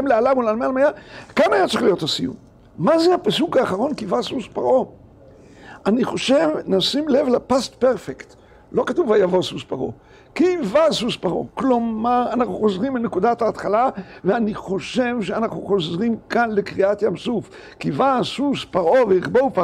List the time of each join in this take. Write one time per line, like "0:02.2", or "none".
none